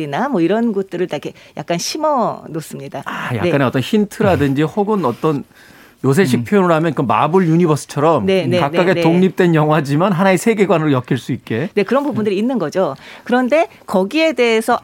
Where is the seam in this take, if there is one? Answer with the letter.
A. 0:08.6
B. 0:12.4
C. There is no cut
C